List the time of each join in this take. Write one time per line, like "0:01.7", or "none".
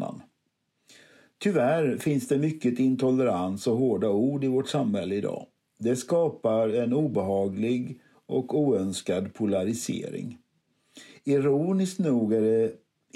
none